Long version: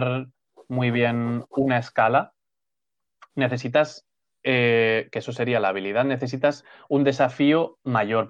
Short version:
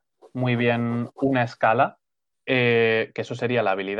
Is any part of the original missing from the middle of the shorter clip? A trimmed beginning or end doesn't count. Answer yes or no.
yes